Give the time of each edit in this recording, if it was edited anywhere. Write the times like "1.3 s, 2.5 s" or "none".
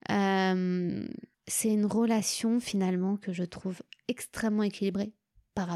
1.3 s